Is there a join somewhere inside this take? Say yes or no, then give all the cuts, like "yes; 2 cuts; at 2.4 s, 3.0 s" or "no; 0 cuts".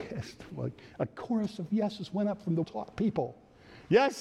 yes; 1 cut; at 2.6 s